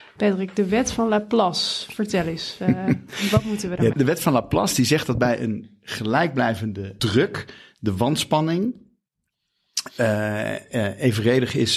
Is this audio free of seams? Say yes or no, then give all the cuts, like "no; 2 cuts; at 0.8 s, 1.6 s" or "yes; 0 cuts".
no; 2 cuts; at 3.9 s, 7.0 s